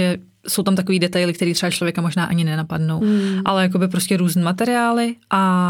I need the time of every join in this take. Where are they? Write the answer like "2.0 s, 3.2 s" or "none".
3.0 s